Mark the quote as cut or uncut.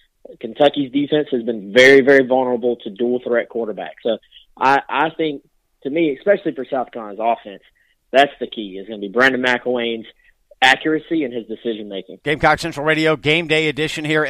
cut